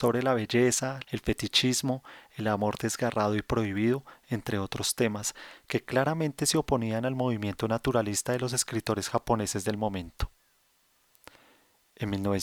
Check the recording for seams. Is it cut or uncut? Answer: cut